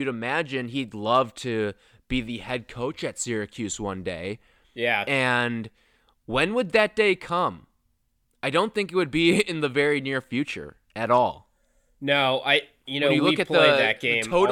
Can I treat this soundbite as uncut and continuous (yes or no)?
yes